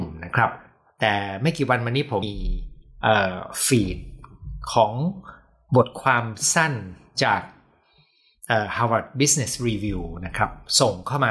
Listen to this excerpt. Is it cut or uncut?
cut